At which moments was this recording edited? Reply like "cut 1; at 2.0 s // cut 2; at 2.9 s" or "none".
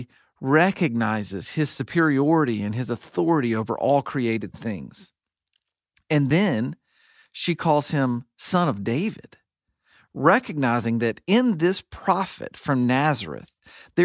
none